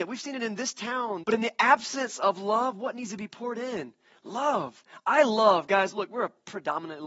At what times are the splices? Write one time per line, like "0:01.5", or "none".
0:01.2